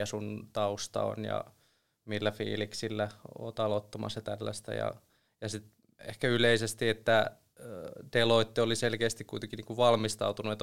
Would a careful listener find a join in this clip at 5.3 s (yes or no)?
no